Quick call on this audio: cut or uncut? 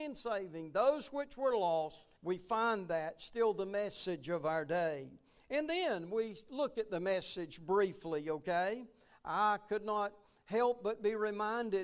cut